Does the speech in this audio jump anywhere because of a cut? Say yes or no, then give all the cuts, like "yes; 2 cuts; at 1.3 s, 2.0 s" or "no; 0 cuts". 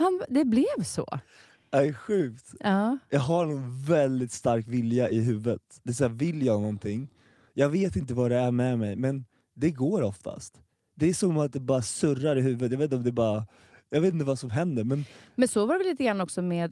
no; 0 cuts